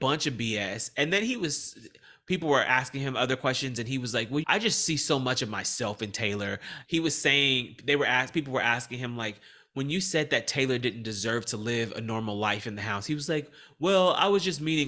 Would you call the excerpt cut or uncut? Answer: cut